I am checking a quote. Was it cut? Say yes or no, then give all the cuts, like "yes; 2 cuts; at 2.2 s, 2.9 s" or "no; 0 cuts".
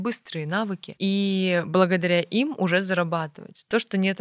no; 0 cuts